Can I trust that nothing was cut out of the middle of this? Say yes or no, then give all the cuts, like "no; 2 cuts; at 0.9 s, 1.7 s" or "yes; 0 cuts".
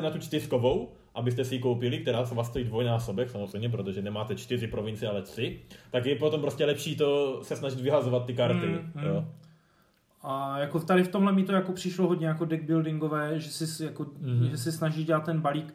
yes; 0 cuts